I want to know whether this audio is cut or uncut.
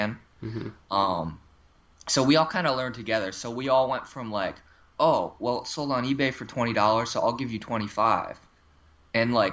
uncut